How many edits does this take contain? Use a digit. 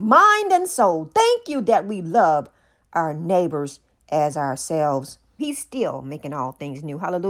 1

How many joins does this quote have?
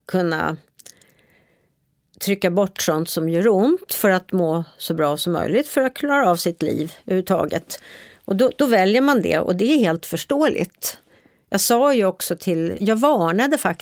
1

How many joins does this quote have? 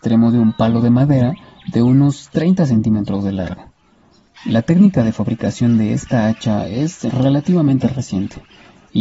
1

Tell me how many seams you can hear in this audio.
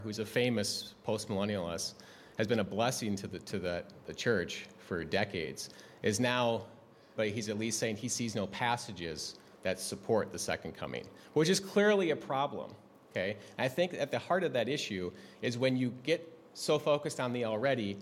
1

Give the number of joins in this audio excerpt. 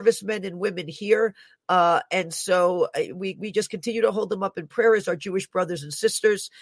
0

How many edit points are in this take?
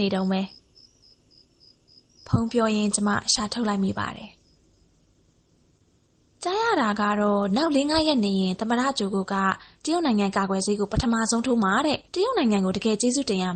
1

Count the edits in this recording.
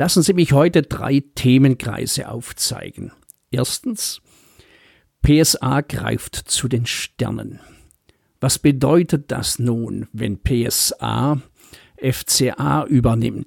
0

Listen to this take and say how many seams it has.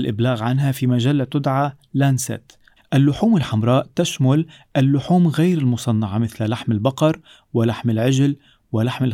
1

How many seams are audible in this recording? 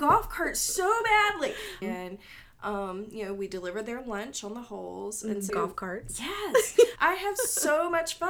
3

